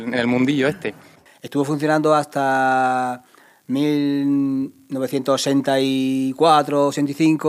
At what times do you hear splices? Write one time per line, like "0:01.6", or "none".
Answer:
0:01.3